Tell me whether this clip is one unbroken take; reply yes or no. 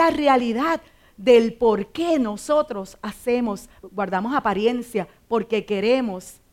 no